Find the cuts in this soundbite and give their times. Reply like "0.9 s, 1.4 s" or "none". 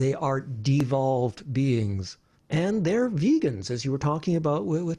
2.3 s